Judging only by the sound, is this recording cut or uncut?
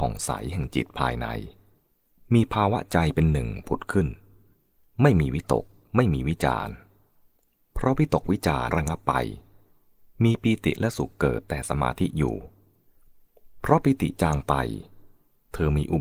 cut